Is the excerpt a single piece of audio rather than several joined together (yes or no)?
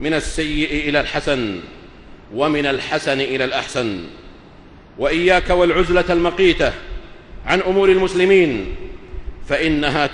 yes